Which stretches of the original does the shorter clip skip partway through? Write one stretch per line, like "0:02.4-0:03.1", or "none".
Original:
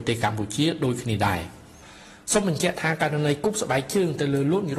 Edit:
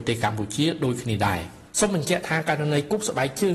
0:01.7-0:02.2